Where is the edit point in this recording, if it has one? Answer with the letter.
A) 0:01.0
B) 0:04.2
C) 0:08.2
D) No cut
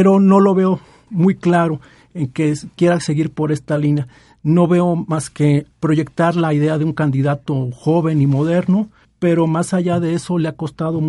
D